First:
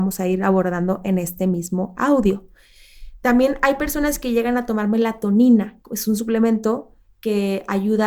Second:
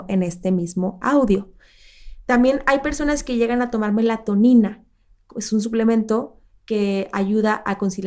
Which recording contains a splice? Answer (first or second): first